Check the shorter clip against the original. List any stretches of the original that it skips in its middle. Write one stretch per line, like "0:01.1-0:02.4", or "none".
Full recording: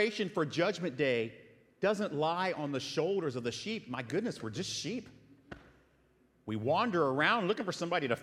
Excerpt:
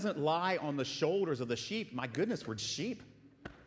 0:04.5-0:04.6